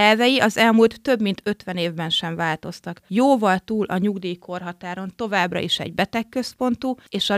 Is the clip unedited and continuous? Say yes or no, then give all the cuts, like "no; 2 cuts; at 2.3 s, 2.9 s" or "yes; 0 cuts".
yes; 0 cuts